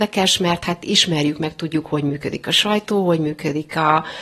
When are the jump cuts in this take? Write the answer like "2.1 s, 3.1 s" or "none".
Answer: none